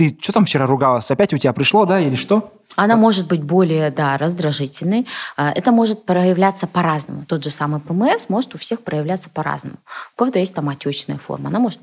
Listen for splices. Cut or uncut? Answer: uncut